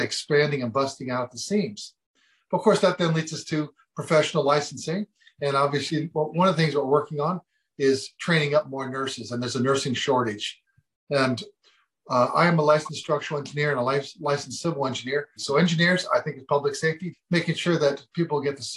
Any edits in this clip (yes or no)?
yes